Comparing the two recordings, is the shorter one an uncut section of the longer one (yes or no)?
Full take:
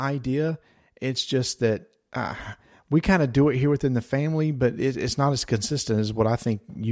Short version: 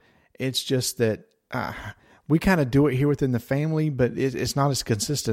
yes